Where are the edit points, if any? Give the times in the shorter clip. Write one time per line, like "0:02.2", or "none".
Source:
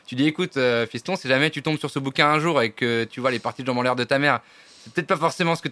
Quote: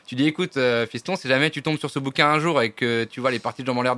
none